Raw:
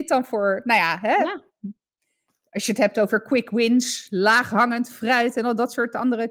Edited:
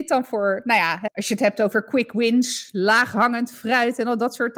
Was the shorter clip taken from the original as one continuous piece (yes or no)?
no